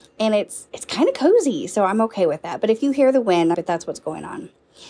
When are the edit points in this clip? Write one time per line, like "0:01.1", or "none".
0:03.5